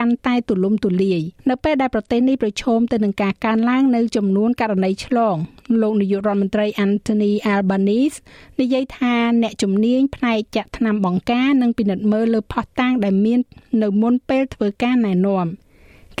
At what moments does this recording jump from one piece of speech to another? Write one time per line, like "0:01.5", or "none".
0:01.4

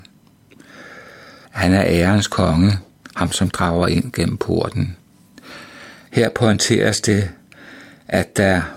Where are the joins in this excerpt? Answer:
0:01.4
0:06.1

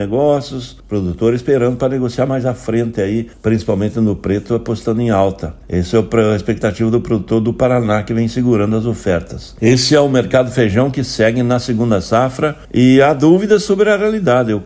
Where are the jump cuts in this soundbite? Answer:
none

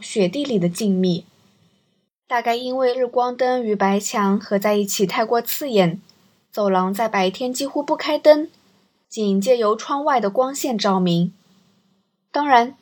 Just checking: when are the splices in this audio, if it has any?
0:02.1

